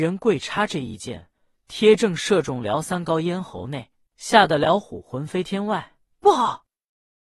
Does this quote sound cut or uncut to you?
cut